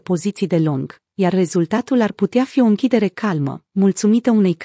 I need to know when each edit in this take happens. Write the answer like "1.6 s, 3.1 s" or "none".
none